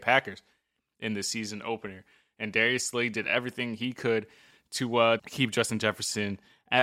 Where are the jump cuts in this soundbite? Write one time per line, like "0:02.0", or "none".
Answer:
0:05.2